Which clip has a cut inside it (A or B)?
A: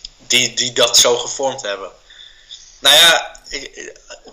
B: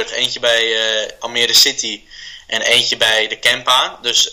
A